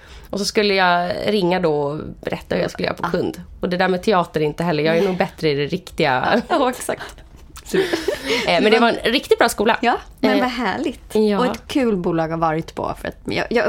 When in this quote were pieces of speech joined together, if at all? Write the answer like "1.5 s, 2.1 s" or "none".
6.5 s